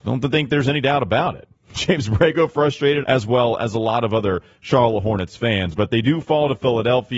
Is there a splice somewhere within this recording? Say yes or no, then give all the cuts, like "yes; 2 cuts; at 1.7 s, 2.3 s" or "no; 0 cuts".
yes; 1 cut; at 3.0 s